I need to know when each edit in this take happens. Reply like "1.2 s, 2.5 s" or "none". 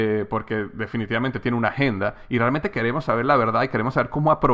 none

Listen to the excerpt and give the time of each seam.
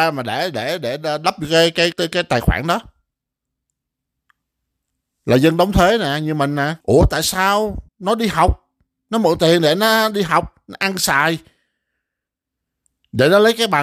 1.9 s, 6.8 s, 7.9 s

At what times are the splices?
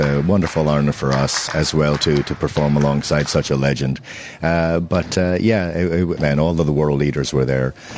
1.5 s, 6.2 s

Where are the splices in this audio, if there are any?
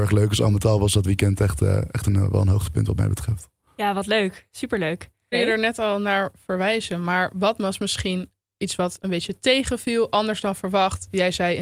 5.3 s

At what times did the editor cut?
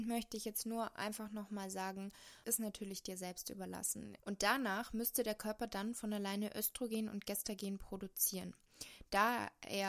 2.4 s, 4.2 s

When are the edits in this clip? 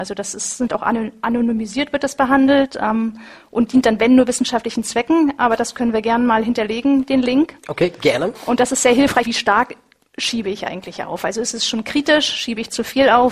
9.2 s

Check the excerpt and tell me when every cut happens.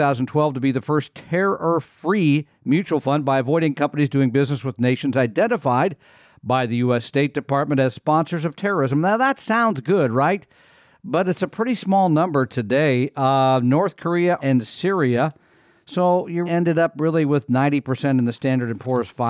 14.4 s, 16.5 s

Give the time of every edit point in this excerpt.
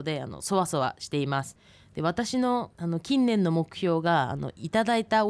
2.7 s

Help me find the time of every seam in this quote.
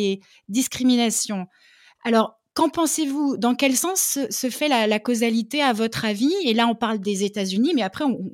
none

